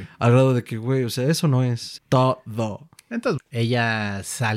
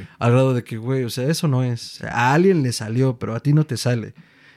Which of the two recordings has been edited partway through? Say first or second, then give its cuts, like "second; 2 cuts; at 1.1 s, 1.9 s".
first; 2 cuts; at 2.0 s, 3.4 s